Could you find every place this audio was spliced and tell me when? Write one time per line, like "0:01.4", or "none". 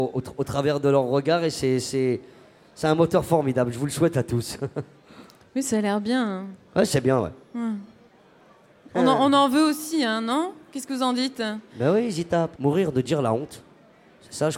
0:12.6